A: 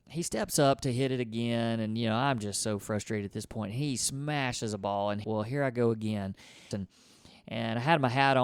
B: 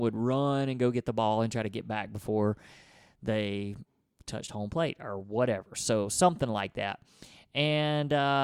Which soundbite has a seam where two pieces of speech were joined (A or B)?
A